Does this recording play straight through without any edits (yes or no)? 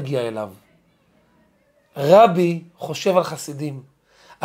yes